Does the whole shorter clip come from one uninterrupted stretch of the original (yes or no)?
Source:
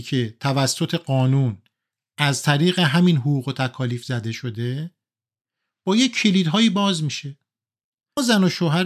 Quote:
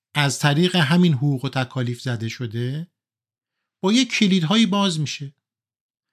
yes